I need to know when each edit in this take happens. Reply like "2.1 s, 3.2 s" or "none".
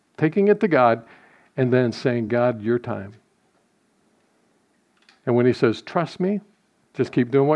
none